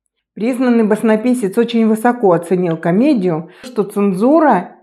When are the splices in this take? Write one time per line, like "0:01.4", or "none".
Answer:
0:03.6